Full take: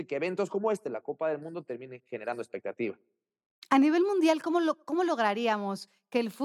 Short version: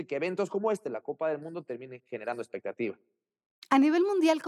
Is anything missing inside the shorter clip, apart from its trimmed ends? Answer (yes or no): no